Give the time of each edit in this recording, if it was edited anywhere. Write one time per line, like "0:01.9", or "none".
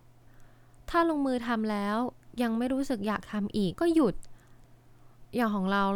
0:03.7